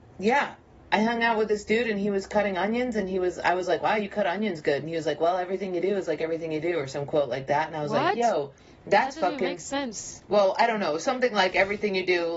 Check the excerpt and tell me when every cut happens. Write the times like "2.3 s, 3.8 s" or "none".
none